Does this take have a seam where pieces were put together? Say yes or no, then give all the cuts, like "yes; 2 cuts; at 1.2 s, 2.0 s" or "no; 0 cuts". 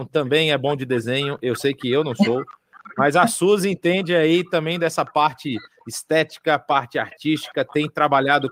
no; 0 cuts